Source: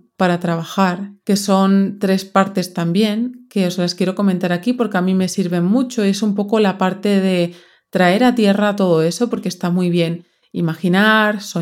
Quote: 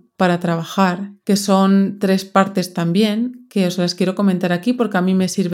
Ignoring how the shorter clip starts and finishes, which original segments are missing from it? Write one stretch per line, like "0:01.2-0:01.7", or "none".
none